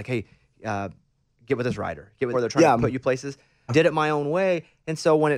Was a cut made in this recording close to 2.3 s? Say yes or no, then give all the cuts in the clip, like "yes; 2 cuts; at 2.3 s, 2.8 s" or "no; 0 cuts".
yes; 2 cuts; at 2.3 s, 3.7 s